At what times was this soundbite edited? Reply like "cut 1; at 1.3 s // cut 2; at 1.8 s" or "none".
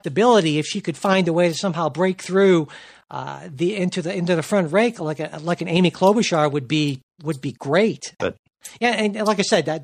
cut 1; at 8.2 s